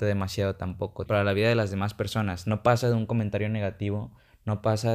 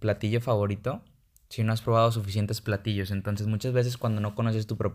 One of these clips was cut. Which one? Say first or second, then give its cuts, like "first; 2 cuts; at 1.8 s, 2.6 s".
first; 1 cut; at 1.1 s